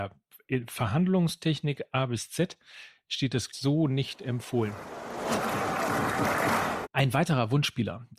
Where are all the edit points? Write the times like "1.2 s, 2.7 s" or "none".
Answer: 3.5 s, 6.8 s